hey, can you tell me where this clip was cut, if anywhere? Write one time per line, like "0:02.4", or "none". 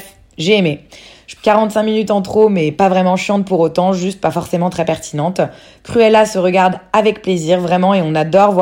0:01.4